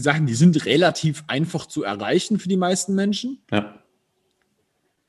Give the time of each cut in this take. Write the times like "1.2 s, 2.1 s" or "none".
3.4 s